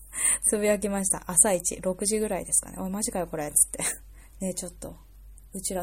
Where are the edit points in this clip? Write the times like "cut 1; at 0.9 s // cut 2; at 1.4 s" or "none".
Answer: cut 1; at 4.3 s